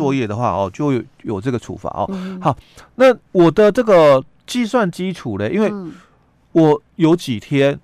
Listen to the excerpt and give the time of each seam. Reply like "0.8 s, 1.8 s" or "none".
3.2 s